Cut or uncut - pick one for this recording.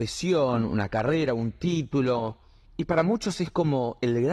uncut